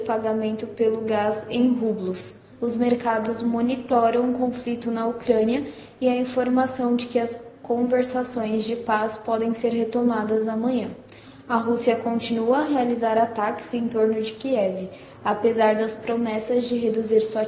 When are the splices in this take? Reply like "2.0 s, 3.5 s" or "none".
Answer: 2.5 s